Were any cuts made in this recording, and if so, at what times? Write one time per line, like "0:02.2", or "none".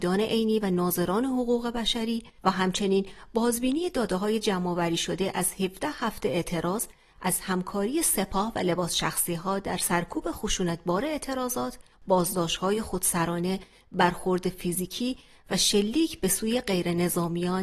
none